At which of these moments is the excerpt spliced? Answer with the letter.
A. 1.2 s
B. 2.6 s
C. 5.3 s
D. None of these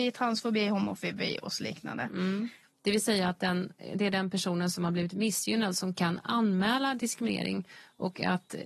B